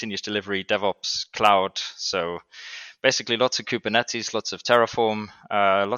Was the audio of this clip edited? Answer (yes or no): no